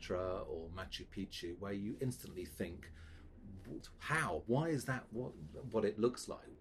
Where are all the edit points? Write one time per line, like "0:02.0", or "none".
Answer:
0:04.5